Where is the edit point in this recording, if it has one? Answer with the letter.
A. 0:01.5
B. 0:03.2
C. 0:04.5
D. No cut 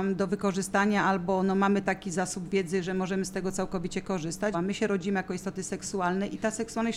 C